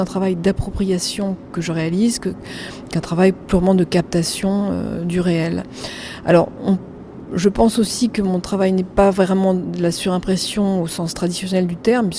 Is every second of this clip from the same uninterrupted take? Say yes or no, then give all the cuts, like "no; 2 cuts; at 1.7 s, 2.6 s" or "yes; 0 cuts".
no; 1 cut; at 1.5 s